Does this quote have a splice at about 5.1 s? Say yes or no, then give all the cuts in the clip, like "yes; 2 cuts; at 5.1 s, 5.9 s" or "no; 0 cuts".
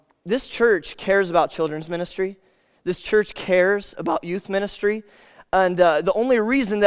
no; 0 cuts